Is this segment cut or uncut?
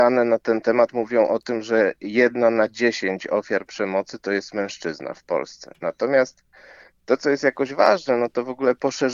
uncut